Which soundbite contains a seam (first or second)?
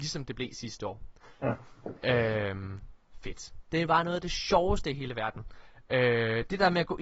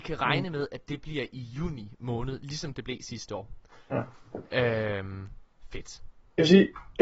first